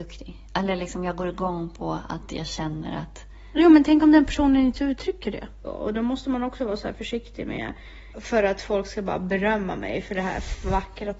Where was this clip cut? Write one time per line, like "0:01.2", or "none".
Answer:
0:05.6
0:08.1

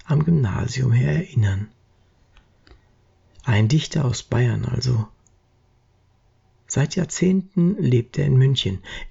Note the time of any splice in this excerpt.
none

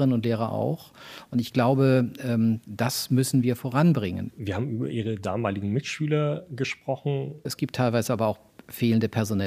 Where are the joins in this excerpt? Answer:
0:04.3
0:07.4

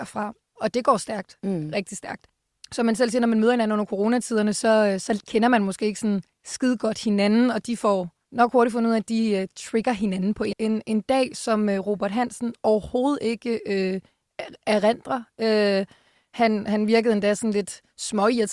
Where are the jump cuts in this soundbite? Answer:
0:10.5

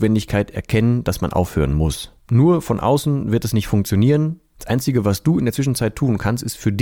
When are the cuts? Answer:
0:02.2
0:04.6

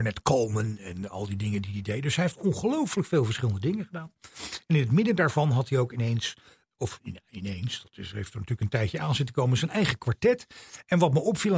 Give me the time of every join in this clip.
none

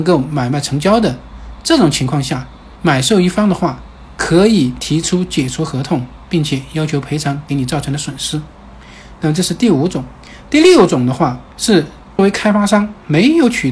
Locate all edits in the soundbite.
none

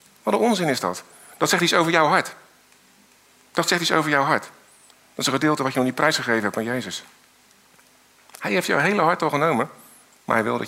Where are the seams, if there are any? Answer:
none

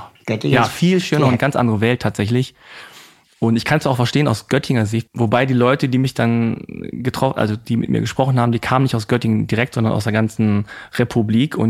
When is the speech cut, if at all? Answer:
0:05.1

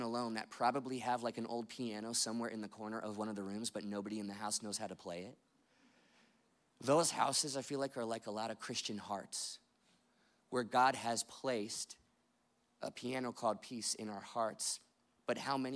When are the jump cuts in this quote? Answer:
none

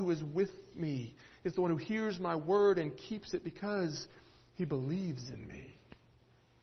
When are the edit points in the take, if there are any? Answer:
none

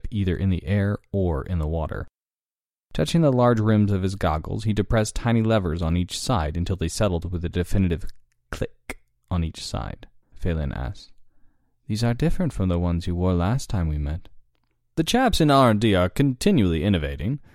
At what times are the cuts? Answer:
0:10.3

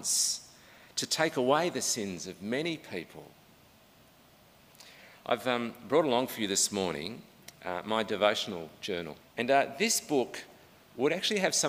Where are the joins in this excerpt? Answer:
0:09.2

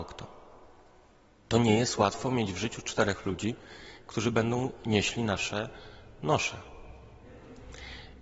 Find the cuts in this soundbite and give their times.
0:01.4

